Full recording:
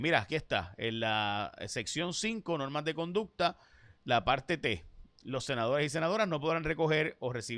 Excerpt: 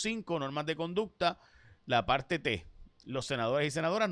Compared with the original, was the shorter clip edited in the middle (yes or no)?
no